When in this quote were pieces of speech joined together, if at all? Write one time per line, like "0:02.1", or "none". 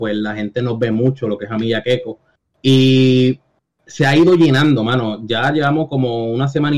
none